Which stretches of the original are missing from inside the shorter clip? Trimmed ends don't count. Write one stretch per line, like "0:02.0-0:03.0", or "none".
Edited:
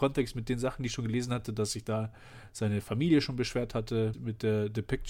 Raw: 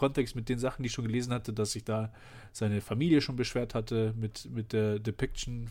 0:04.1-0:04.4